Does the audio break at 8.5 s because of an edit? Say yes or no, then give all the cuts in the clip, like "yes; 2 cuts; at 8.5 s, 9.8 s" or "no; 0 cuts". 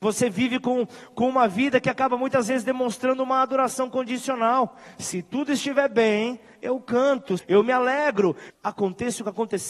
yes; 2 cuts; at 7.4 s, 8.5 s